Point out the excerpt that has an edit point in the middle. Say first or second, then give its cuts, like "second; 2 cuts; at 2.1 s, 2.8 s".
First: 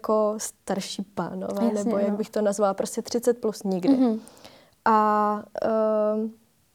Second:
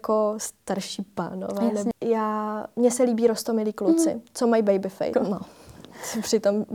second; 2 cuts; at 1.9 s, 5.1 s